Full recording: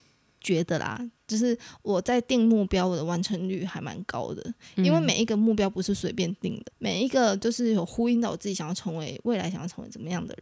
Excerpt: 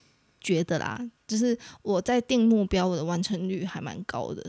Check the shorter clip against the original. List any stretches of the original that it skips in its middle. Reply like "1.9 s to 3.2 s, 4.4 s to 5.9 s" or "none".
none